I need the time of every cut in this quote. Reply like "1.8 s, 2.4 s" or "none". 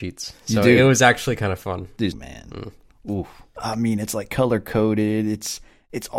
2.1 s, 3.6 s